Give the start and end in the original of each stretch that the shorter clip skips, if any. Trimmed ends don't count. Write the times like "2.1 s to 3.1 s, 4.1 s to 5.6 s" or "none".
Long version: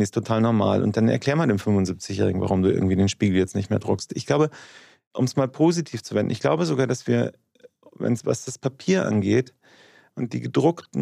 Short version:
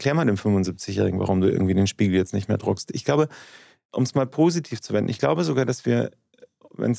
none